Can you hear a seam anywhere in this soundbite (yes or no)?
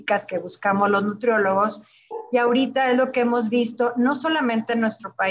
no